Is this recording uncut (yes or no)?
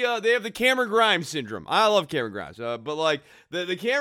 yes